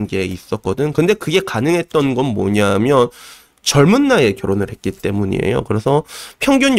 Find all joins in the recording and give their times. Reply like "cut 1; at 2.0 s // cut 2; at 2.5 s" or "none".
none